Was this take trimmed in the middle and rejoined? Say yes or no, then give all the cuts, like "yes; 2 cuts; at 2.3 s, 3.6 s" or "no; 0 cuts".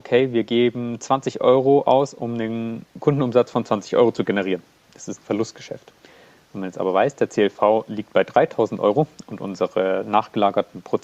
no; 0 cuts